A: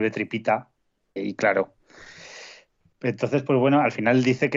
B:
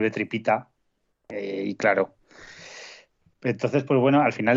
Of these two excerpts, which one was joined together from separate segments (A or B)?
A